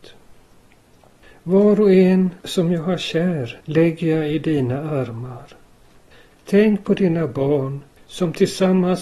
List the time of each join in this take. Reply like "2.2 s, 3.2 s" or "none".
3.6 s, 6.3 s